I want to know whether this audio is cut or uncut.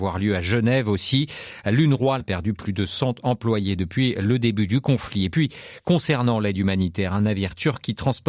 cut